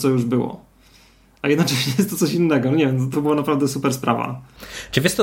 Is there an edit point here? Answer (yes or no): yes